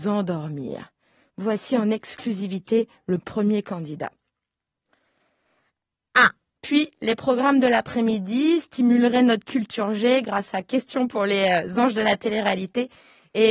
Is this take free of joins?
no; 1 cut; at 6.5 s

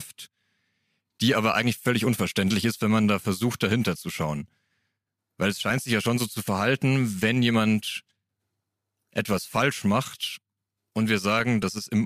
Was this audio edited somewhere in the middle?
no; 0 cuts

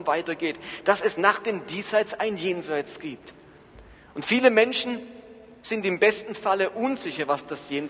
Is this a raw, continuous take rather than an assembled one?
yes; 0 cuts

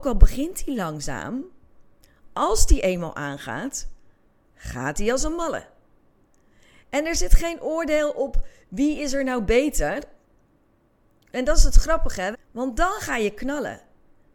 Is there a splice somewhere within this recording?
yes; 1 cut; at 12.3 s

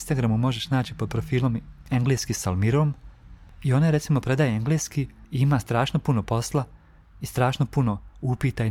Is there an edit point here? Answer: no; 0 cuts

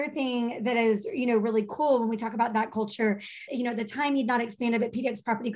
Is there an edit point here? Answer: yes; 1 cut; at 3.5 s

